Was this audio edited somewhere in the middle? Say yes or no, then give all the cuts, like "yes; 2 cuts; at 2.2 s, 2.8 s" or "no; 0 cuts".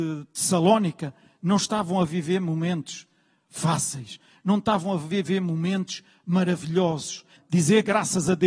yes; 1 cut; at 7.4 s